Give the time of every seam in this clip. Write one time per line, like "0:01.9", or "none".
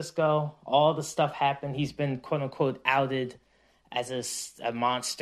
none